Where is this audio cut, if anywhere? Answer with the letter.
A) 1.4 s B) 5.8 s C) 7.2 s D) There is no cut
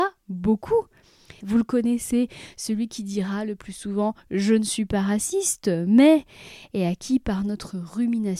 A